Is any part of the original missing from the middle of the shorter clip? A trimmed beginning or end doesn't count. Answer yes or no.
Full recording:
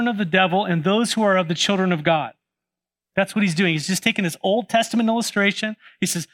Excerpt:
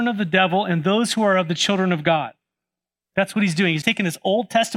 yes